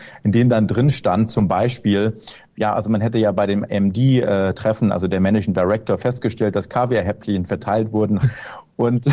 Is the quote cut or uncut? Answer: cut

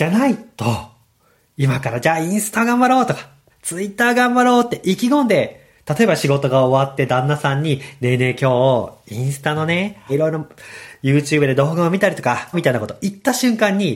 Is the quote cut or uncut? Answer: cut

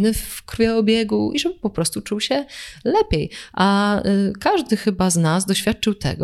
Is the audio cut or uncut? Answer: uncut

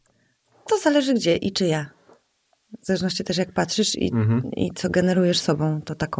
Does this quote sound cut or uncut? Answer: uncut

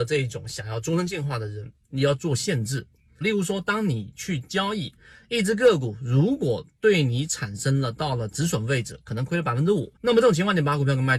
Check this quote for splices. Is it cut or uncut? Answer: cut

